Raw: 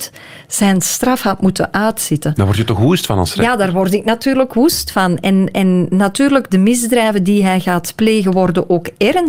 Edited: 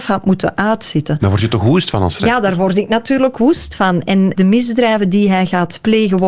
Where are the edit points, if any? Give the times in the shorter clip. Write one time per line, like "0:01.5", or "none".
0:04.3